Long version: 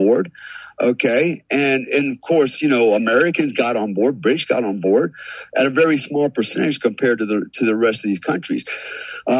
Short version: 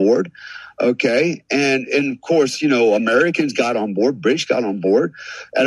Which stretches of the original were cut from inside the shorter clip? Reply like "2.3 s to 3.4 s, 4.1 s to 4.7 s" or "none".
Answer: none